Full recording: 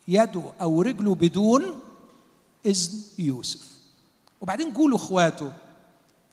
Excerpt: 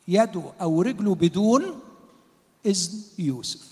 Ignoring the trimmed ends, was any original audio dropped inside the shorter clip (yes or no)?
no